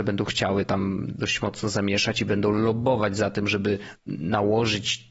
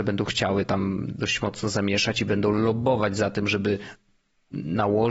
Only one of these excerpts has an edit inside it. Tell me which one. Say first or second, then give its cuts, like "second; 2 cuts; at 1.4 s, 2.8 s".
first; 1 cut; at 4.0 s